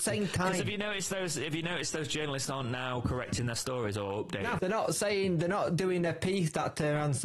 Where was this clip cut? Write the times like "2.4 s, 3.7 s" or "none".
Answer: 4.6 s